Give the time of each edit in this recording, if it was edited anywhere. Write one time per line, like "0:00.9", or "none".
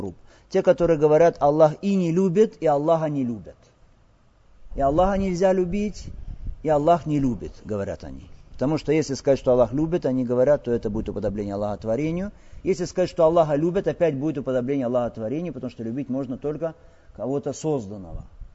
none